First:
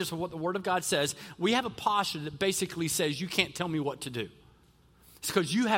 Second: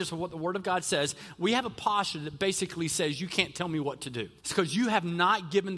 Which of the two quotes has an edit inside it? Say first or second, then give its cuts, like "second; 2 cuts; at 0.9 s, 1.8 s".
second; 1 cut; at 4.4 s